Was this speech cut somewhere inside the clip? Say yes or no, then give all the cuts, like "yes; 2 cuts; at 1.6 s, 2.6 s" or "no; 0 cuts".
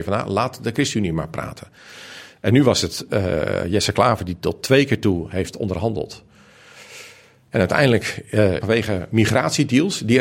yes; 1 cut; at 8.6 s